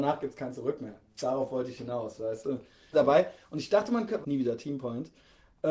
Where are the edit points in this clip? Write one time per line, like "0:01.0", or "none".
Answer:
0:02.9
0:04.2